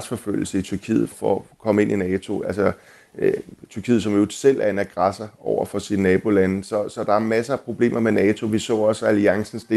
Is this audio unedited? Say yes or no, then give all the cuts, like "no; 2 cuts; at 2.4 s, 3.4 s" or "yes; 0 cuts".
no; 1 cut; at 1.1 s